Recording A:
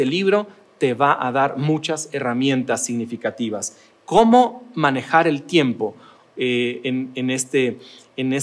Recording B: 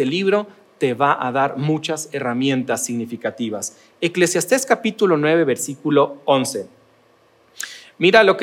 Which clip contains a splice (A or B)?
A